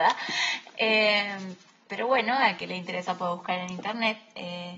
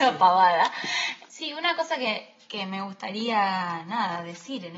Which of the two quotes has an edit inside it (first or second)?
second